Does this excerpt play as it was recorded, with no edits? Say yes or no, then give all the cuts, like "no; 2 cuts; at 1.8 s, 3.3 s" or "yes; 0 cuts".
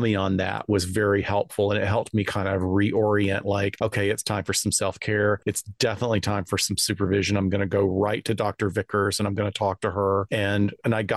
yes; 0 cuts